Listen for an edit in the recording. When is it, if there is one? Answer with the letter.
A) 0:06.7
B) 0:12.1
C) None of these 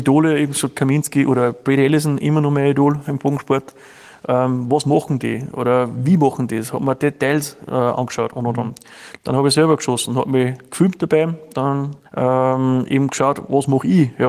B